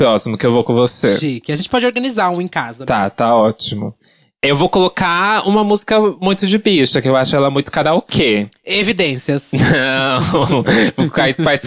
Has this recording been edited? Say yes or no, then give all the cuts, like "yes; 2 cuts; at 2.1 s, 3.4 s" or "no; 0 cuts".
no; 0 cuts